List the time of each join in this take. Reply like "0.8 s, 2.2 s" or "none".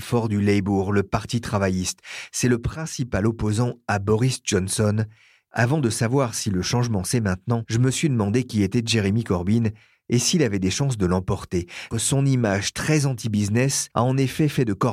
5.5 s, 11.9 s